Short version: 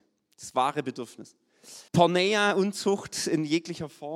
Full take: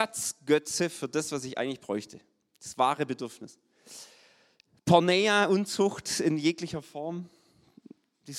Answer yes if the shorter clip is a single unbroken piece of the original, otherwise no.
no